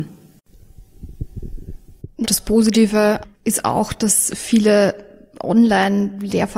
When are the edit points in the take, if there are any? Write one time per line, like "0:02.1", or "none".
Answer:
0:02.2
0:03.3